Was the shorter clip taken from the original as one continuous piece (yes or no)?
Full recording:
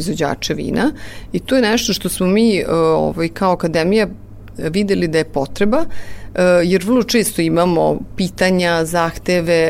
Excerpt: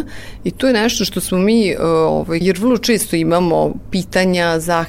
no